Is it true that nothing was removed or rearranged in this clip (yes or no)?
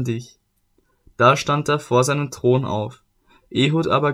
yes